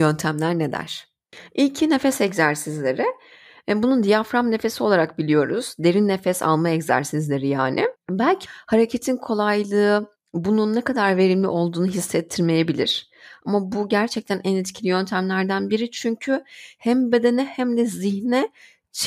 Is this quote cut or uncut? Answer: uncut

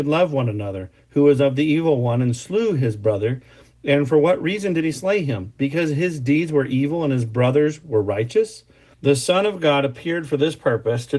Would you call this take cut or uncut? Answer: cut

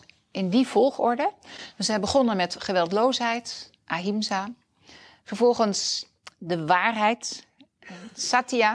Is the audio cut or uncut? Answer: uncut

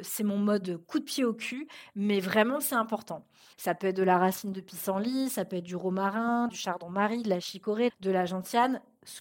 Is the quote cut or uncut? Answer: cut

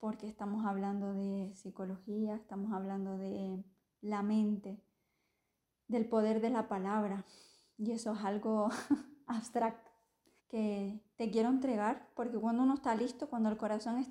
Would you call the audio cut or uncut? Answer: cut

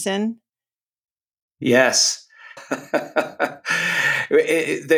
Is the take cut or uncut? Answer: cut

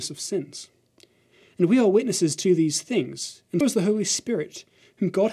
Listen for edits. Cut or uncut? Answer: cut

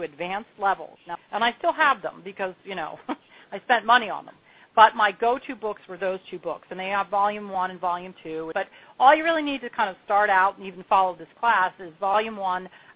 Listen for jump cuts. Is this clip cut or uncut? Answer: cut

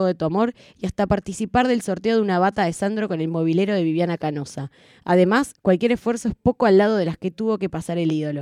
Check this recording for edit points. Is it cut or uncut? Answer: uncut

